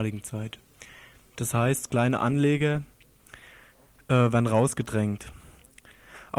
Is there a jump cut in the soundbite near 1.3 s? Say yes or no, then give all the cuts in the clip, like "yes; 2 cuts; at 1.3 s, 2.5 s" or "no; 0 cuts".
yes; 1 cut; at 1.3 s